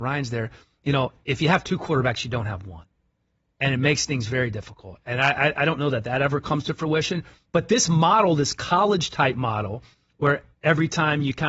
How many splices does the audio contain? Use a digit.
0